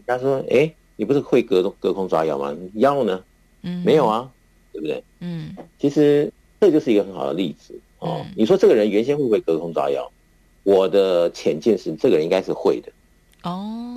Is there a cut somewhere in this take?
no; 0 cuts

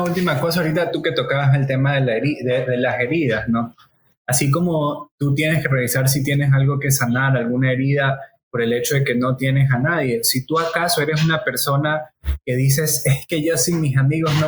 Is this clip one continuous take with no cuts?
yes; 0 cuts

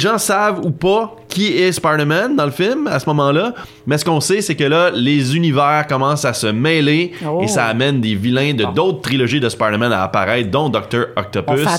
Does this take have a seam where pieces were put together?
no; 0 cuts

